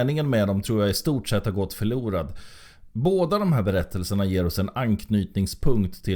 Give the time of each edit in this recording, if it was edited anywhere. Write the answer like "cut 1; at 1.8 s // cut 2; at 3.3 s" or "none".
cut 1; at 2.9 s